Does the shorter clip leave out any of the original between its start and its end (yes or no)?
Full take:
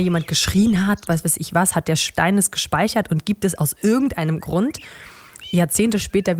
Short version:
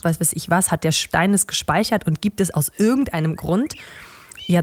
no